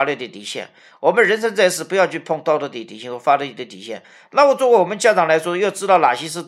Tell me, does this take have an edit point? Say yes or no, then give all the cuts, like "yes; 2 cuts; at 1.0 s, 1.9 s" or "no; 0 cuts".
no; 0 cuts